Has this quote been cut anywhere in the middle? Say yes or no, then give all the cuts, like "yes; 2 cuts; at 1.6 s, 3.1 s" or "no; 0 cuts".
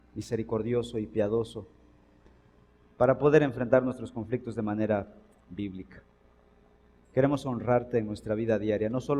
no; 0 cuts